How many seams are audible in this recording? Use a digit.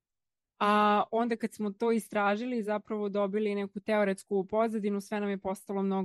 0